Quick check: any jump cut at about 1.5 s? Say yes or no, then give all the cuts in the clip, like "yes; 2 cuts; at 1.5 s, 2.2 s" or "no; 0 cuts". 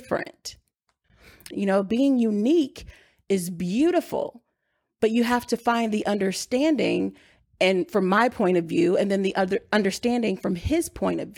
yes; 1 cut; at 1.5 s